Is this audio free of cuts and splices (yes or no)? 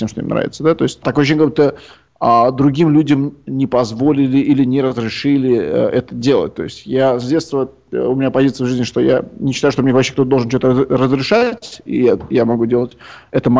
yes